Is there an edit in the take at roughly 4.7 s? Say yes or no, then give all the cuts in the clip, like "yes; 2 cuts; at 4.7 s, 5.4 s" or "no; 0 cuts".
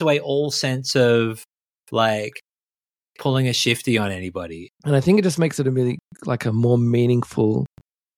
yes; 1 cut; at 4.7 s